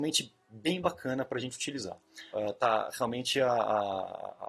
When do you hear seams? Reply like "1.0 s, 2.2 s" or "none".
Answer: 2.3 s